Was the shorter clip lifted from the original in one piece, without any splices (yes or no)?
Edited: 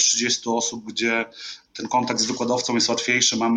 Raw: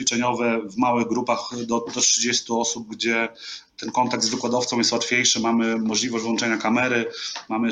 yes